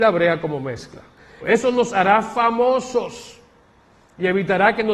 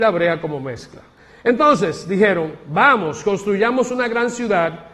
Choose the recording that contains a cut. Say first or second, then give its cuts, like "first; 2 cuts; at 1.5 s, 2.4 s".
first; 1 cut; at 1.4 s